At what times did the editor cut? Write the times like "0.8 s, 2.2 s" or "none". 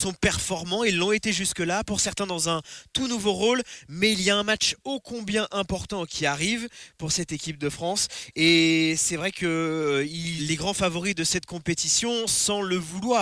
10.4 s